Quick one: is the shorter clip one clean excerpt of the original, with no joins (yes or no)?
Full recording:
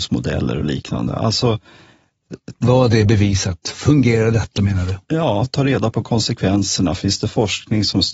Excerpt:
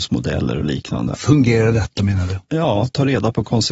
no